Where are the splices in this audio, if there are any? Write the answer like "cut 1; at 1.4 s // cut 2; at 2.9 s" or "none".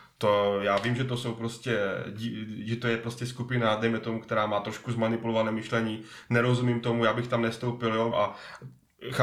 cut 1; at 8.1 s